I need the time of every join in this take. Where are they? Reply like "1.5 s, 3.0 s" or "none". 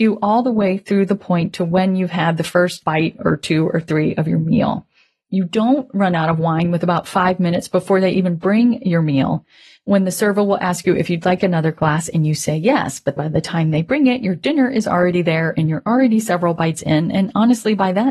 13.2 s

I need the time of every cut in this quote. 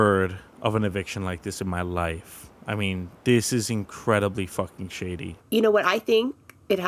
5.4 s

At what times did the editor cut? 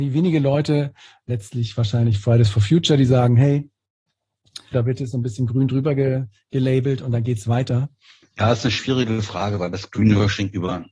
4.7 s, 8.2 s

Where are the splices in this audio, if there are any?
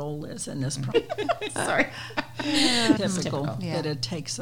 0.9 s, 3.0 s

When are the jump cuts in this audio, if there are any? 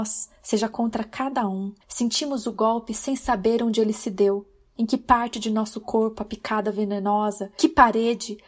1.8 s

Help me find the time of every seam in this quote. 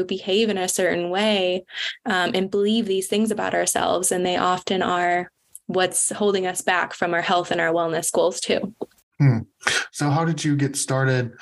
none

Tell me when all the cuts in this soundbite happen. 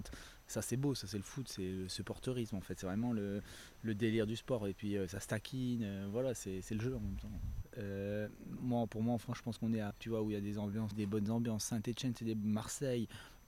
7.6 s, 9.9 s, 10.9 s

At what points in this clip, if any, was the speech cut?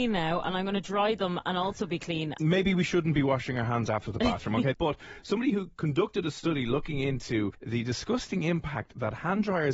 2.4 s, 4.7 s

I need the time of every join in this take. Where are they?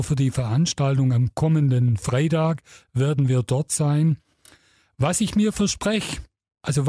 none

